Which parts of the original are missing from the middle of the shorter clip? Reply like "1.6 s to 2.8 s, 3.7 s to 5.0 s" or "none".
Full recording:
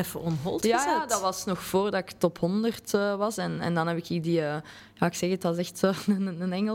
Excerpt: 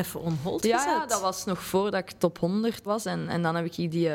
2.9 s to 3.2 s